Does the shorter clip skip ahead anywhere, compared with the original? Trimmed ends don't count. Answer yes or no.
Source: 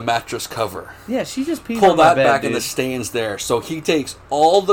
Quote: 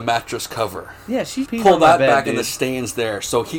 yes